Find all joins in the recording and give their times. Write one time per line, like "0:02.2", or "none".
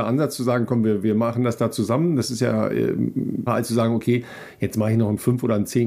0:03.5